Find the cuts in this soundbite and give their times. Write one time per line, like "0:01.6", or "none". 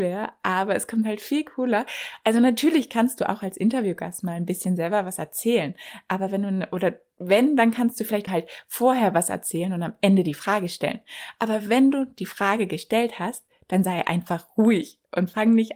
0:08.3